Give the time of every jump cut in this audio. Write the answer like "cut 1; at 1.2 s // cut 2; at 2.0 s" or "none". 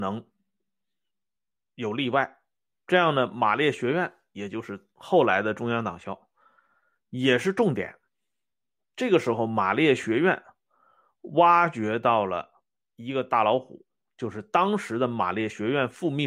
none

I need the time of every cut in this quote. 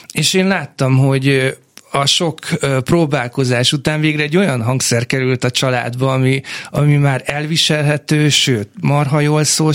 none

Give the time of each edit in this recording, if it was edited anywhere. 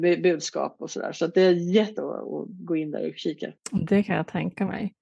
cut 1; at 2.0 s

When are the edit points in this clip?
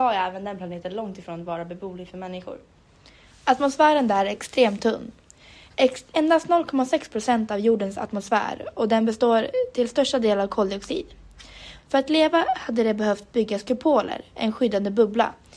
cut 1; at 6.1 s // cut 2; at 11.8 s

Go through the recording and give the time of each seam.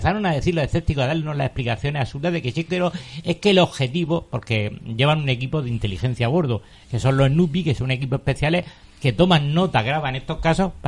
none

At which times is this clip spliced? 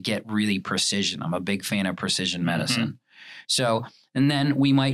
none

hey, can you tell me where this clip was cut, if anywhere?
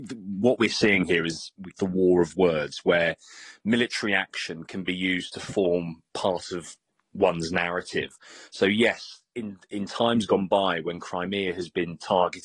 cut 1; at 1.7 s

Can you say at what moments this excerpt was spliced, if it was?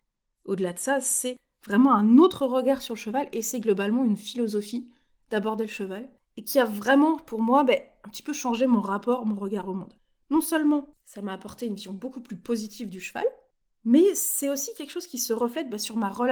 none

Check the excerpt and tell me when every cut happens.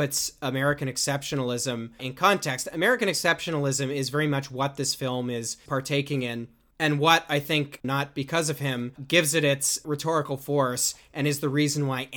cut 1; at 2.0 s // cut 2; at 7.8 s

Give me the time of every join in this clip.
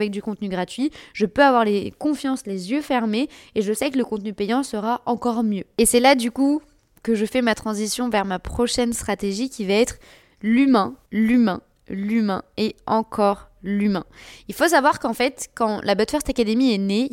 cut 1; at 11.0 s

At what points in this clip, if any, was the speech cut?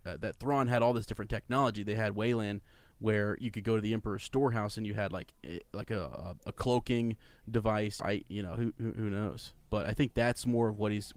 cut 1; at 8.0 s

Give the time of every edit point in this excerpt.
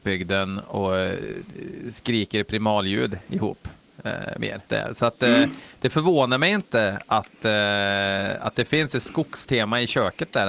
cut 1; at 4.7 s

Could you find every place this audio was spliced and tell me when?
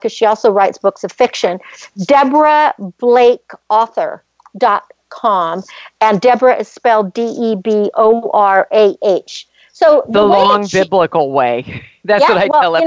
none

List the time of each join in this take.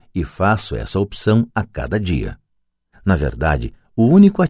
cut 1; at 2.9 s

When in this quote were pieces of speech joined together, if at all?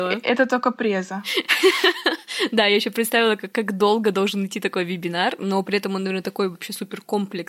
cut 1; at 3.5 s

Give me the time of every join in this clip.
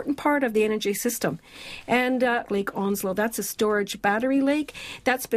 cut 1; at 2.5 s

